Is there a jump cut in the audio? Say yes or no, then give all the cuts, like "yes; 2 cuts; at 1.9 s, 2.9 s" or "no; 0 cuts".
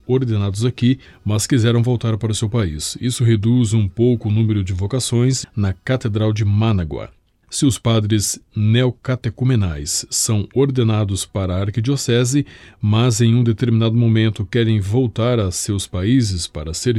yes; 1 cut; at 5.4 s